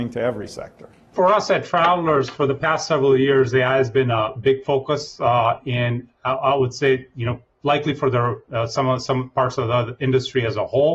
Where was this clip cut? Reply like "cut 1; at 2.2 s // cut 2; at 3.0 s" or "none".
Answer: none